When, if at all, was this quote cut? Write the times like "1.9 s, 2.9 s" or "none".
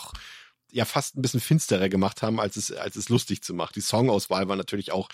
3.7 s